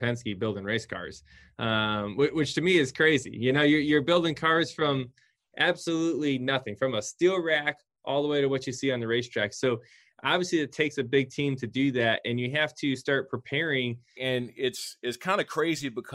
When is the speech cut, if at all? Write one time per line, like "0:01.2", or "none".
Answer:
0:14.2